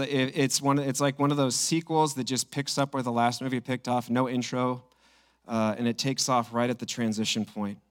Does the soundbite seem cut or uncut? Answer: uncut